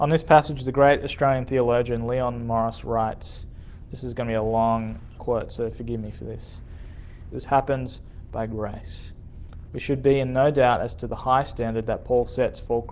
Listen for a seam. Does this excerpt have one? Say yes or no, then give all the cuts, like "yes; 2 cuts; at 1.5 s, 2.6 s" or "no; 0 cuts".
yes; 3 cuts; at 5.1 s, 7.3 s, 9.7 s